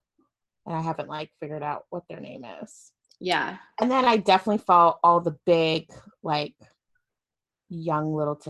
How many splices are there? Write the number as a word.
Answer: zero